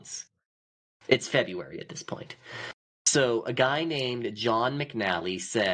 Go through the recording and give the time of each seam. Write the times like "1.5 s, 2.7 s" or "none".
none